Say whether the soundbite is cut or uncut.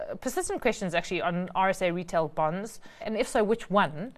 cut